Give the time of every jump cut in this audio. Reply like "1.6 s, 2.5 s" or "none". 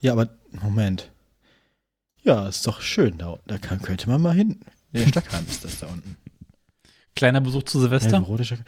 none